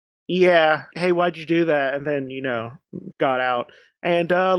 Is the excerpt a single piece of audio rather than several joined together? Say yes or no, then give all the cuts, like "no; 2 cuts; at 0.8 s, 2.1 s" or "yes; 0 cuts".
no; 2 cuts; at 0.9 s, 3.1 s